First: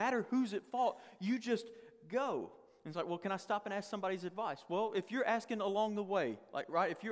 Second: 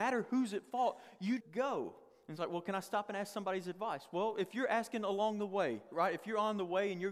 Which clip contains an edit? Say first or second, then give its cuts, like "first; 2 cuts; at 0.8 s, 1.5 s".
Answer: second; 2 cuts; at 1.4 s, 5.9 s